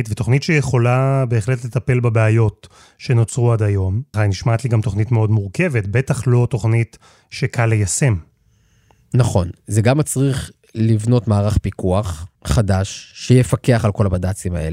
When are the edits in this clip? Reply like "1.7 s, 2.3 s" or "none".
4.1 s, 12.4 s